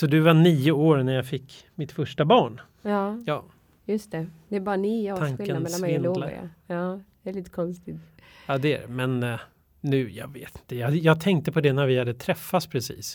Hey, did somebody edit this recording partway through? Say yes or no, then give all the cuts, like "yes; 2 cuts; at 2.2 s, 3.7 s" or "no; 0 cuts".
no; 0 cuts